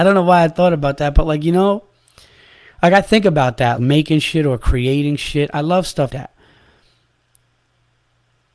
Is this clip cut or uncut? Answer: cut